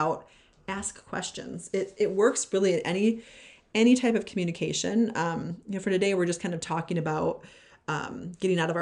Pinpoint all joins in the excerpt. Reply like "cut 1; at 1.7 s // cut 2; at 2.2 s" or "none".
none